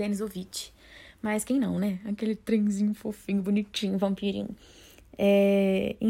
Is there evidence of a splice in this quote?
no; 0 cuts

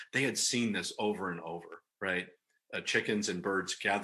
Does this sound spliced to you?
yes; 1 cut; at 1.9 s

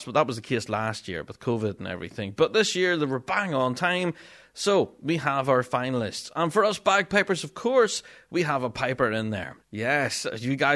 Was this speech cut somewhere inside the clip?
yes; 1 cut; at 9.6 s

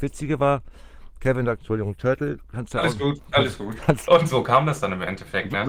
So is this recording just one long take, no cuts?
no; 2 cuts; at 1.5 s, 4.0 s

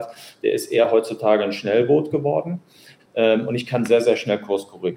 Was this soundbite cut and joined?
no; 0 cuts

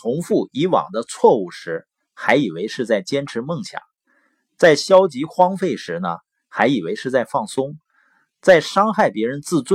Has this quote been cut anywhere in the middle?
no; 0 cuts

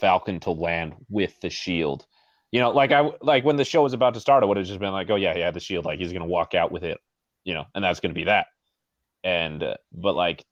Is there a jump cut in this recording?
no; 0 cuts

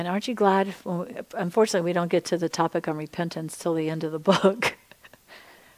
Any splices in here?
no; 0 cuts

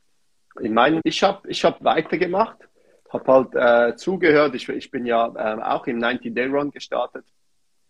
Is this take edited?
yes; 1 cut; at 1.0 s

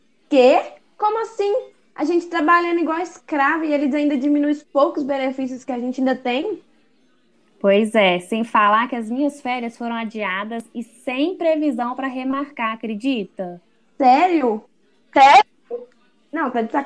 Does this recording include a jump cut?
no; 0 cuts

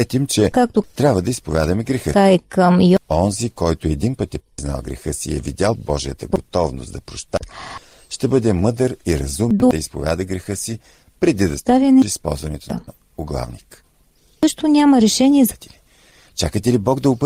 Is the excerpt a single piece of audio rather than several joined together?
yes; 0 cuts

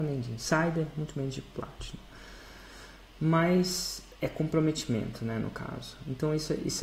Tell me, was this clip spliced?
yes; 1 cut; at 4.2 s

